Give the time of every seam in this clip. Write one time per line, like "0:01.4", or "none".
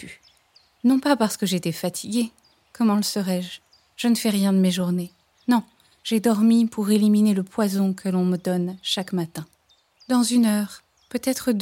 none